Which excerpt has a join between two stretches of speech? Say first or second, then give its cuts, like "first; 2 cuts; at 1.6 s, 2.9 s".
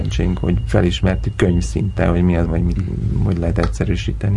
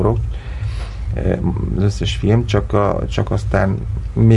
first; 1 cut; at 2.5 s